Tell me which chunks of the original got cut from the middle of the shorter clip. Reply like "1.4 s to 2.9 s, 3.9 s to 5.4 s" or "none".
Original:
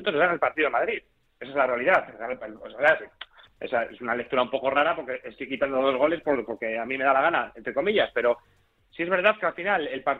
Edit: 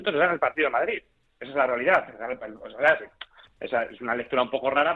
none